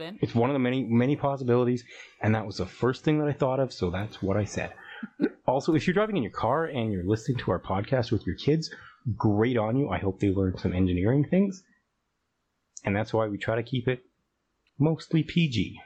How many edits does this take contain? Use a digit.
0